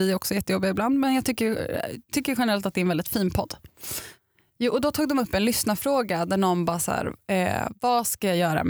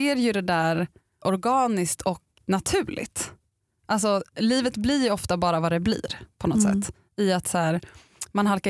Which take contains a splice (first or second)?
second